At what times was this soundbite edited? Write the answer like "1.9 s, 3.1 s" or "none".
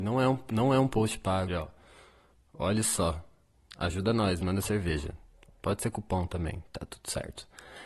1.5 s